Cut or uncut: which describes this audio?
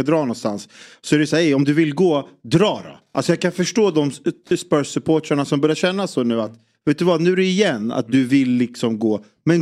uncut